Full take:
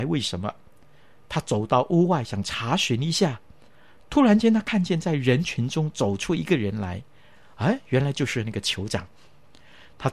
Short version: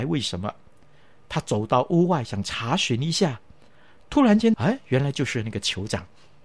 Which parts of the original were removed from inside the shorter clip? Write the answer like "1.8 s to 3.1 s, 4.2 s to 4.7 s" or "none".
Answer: 4.5 s to 7.5 s